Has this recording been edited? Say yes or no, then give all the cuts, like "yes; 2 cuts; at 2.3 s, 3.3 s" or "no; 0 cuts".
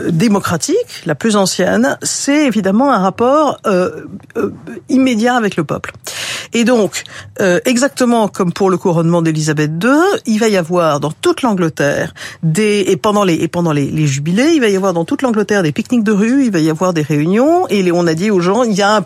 no; 0 cuts